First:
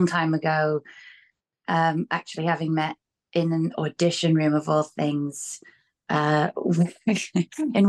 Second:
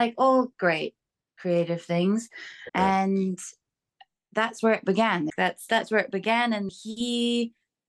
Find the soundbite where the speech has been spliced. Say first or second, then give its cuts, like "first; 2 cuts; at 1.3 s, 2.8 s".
second; 3 cuts; at 2.7 s, 5.3 s, 6.7 s